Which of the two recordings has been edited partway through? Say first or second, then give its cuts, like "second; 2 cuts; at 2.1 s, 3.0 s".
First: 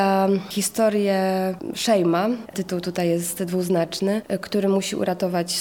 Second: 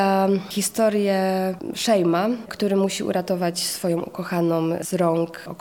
second; 1 cut; at 2.5 s